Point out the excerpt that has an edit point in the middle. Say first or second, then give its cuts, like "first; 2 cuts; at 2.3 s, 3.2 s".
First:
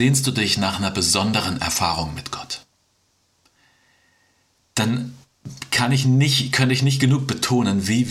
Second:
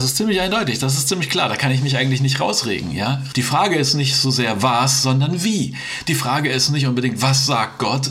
second; 1 cut; at 3.3 s